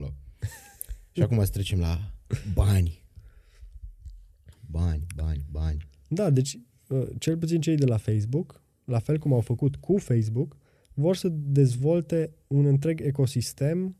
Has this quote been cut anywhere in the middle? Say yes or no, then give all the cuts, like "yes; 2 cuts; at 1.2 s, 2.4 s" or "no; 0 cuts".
no; 0 cuts